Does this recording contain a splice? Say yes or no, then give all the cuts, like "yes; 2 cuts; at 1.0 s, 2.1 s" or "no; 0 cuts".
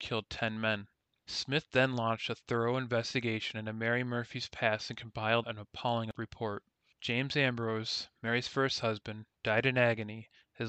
yes; 1 cut; at 5.4 s